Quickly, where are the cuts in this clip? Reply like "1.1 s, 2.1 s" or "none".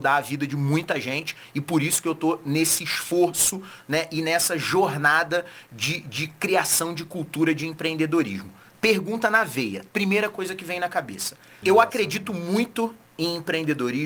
9.9 s, 11.6 s